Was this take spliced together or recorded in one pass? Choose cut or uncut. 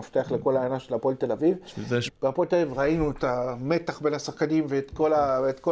cut